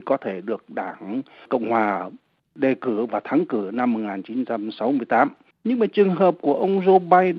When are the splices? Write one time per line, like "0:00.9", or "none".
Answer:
0:05.5